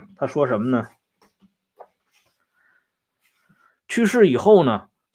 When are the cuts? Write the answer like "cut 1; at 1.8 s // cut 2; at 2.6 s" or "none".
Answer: cut 1; at 3.7 s